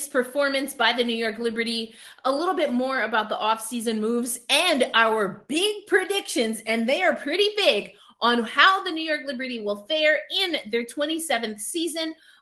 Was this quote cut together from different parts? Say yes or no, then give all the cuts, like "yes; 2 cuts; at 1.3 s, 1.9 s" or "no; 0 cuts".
no; 0 cuts